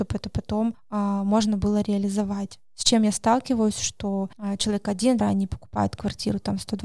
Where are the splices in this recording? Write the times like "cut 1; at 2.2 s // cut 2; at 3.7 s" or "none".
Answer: cut 1; at 5.2 s